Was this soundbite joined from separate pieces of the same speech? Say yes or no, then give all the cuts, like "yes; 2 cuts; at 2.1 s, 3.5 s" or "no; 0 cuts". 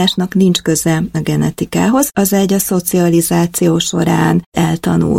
no; 0 cuts